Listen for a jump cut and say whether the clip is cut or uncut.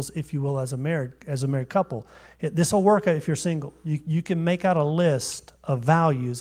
uncut